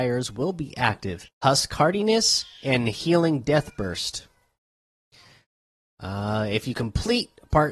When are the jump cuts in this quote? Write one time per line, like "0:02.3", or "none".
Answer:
0:01.2